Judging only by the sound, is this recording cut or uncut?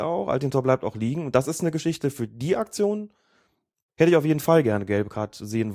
uncut